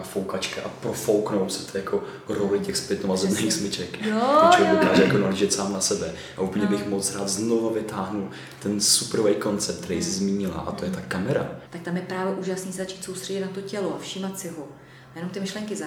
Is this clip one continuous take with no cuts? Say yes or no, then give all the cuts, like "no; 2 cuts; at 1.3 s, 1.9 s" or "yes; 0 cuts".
no; 1 cut; at 11.7 s